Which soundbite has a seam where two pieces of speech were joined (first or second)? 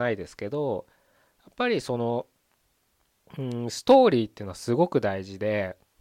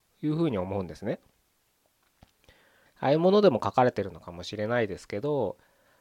second